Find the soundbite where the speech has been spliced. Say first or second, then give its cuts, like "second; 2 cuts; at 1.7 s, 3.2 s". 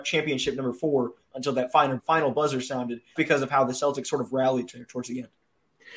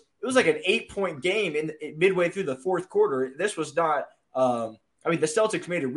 first; 2 cuts; at 2.0 s, 3.2 s